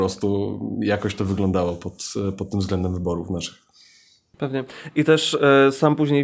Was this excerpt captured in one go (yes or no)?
yes